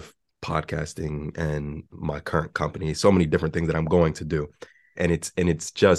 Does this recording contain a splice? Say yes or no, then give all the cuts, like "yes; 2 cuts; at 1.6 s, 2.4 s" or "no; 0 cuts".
yes; 1 cut; at 5.0 s